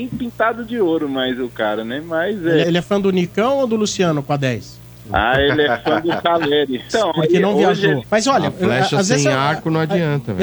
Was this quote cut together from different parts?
yes; 3 cuts; at 2.6 s, 6.9 s, 8.0 s

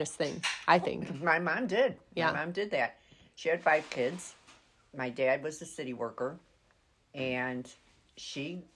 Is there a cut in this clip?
no; 0 cuts

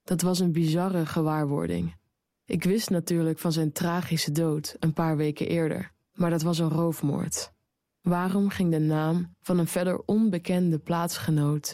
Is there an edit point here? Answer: no; 0 cuts

